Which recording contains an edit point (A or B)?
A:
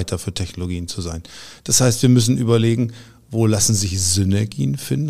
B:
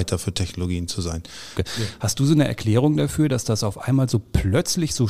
B